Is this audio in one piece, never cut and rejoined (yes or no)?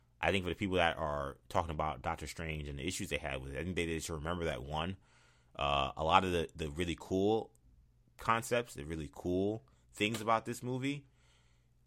yes